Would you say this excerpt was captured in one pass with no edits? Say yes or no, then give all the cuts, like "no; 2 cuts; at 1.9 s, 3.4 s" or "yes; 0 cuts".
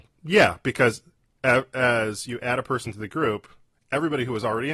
yes; 0 cuts